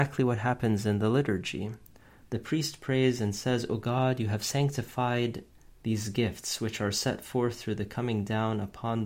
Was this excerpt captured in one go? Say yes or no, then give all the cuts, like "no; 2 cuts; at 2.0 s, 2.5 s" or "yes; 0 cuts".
no; 1 cut; at 2.2 s